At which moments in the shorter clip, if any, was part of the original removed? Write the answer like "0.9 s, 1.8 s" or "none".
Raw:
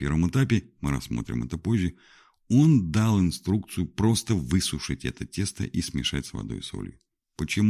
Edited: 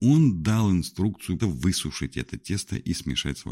1.4 s